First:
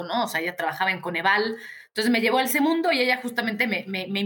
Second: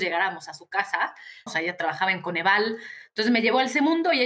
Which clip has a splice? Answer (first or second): second